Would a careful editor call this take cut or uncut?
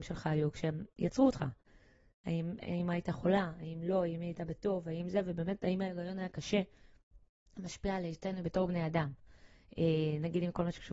uncut